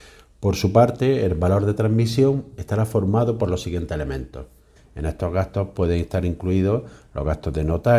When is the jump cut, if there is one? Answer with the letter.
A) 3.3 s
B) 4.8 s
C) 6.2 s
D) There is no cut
B